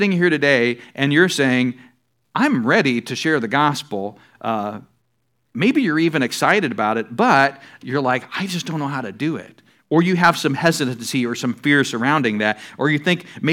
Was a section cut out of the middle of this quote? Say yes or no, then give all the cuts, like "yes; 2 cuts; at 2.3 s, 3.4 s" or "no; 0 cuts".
no; 0 cuts